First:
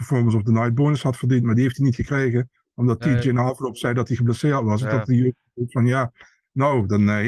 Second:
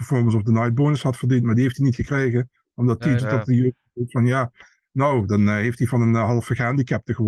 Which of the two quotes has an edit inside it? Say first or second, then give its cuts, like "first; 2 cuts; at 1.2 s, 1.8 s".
second; 1 cut; at 3.2 s